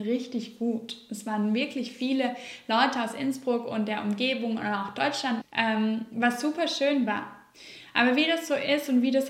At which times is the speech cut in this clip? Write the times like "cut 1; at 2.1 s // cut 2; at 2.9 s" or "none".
cut 1; at 5.4 s